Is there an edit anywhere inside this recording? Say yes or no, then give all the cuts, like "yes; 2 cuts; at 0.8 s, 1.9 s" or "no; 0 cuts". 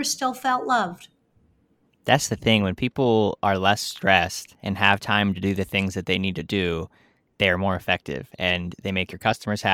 no; 0 cuts